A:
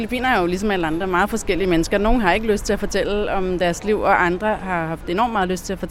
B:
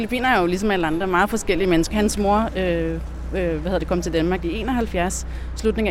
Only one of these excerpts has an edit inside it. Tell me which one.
B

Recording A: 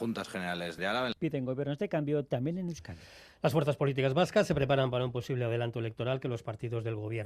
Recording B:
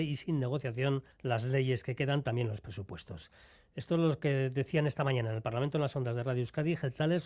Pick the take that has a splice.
B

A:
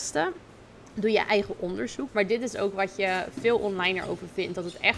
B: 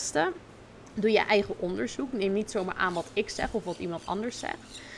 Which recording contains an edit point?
A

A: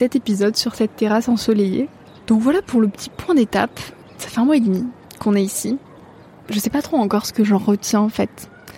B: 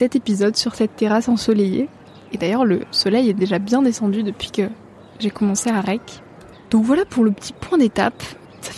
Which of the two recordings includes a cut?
A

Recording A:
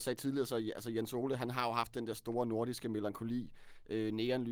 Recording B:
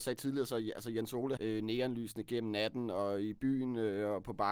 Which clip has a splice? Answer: B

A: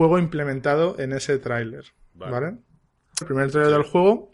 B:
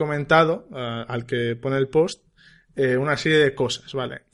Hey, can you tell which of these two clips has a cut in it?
A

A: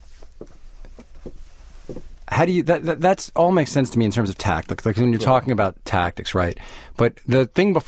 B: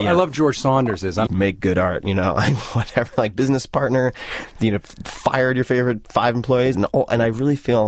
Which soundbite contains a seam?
B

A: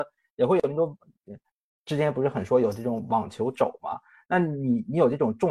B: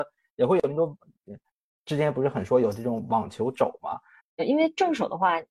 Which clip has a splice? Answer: B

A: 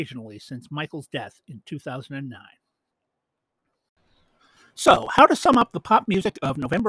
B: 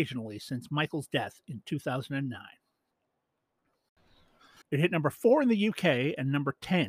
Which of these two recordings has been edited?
B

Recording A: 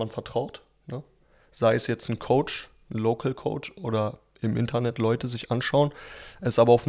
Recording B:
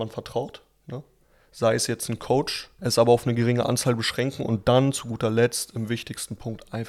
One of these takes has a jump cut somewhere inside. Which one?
B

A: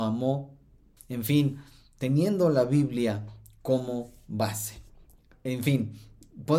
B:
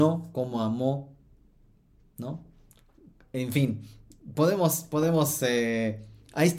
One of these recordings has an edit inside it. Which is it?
A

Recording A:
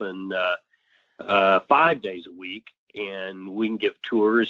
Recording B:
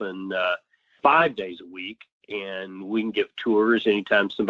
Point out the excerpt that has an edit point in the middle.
B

